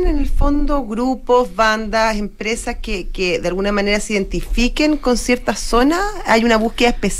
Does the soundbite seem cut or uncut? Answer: uncut